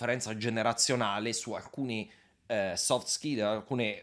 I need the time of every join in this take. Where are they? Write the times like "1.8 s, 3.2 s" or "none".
none